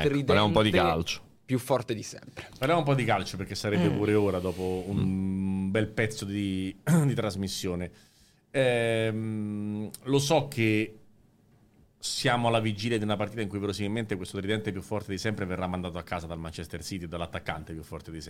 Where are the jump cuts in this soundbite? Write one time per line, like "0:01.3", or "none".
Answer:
none